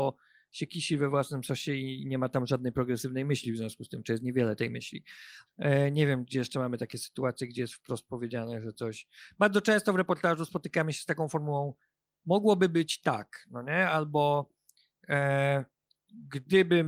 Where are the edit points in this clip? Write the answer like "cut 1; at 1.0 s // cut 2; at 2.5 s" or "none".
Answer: cut 1; at 5.5 s